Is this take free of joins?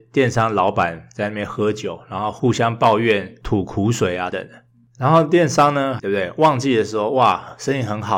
no; 2 cuts; at 4.3 s, 6.0 s

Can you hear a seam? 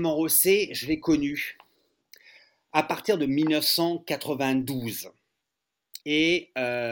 yes; 1 cut; at 6.0 s

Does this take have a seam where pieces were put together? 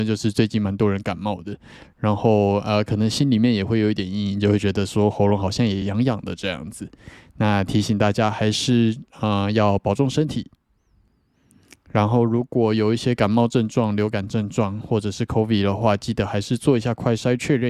no; 0 cuts

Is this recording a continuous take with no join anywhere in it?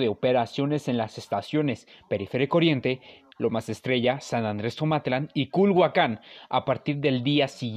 no; 1 cut; at 3.3 s

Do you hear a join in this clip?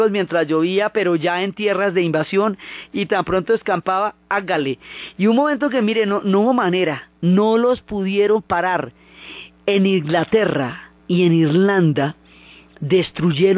yes; 1 cut; at 11.0 s

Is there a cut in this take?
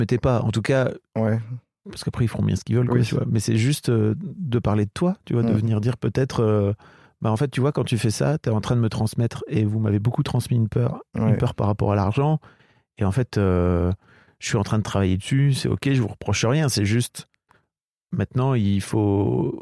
no; 0 cuts

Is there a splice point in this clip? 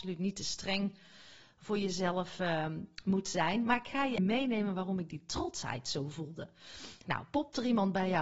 yes; 2 cuts; at 4.2 s, 7.0 s

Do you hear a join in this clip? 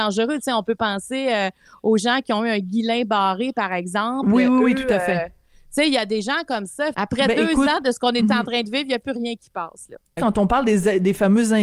yes; 2 cuts; at 6.9 s, 10.2 s

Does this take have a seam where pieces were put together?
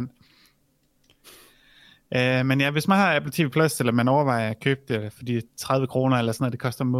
no; 0 cuts

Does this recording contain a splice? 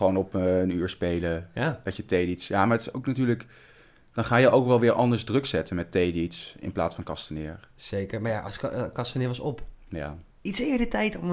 yes; 1 cut; at 10.3 s

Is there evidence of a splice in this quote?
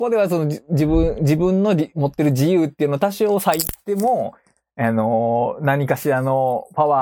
no; 0 cuts

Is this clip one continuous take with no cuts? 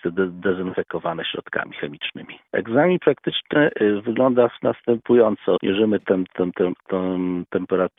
no; 2 cuts; at 2.5 s, 5.6 s

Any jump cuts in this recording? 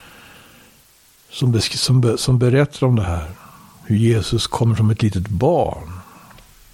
no; 0 cuts

